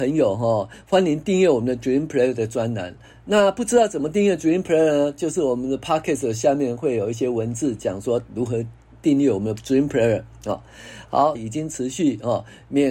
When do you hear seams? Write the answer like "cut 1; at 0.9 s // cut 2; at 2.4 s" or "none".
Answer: cut 1; at 11.4 s